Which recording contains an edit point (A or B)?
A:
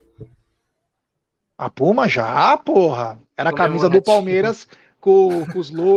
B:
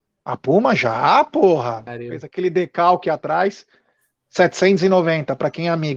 B